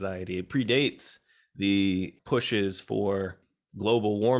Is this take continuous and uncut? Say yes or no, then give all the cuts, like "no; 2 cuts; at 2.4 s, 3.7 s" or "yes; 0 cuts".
yes; 0 cuts